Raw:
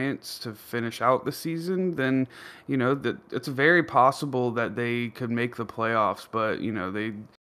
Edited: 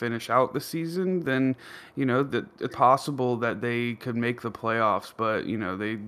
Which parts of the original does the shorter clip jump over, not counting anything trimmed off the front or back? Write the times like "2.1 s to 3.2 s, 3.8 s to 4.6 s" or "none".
3.4 s to 3.8 s